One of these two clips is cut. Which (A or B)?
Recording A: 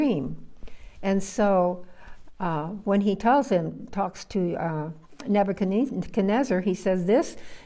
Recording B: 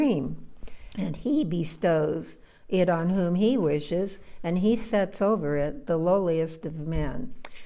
B